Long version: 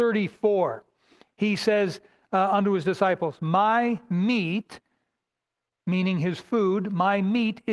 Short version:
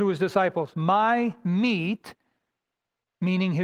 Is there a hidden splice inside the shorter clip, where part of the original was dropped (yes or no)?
no